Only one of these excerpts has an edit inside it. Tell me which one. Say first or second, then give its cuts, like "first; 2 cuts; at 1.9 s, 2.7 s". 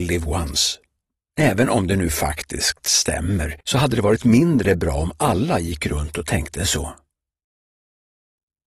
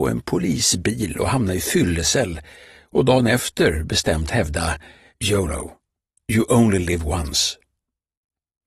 first; 2 cuts; at 1.3 s, 3.6 s